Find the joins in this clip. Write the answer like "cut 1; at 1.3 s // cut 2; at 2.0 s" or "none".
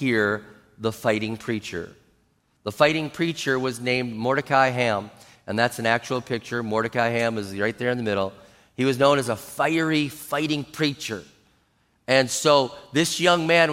none